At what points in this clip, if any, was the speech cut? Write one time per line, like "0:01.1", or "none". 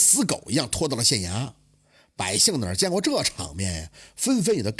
none